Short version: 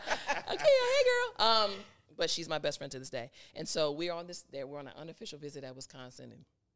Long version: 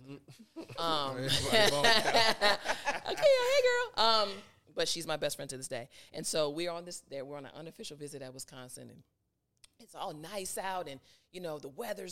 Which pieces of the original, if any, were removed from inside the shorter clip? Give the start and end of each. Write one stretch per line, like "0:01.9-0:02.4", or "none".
none